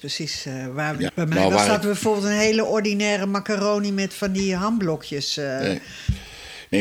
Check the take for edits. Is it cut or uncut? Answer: cut